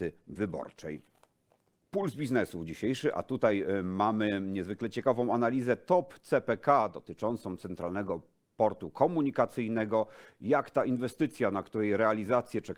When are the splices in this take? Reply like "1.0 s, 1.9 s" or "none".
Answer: none